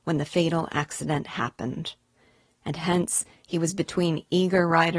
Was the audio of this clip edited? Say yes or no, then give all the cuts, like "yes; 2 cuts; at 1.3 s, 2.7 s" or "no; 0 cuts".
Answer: no; 0 cuts